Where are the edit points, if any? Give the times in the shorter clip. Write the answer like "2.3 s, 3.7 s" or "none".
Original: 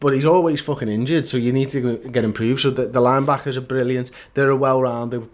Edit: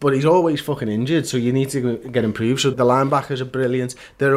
2.7 s